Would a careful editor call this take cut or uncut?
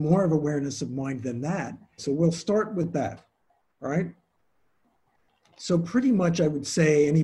cut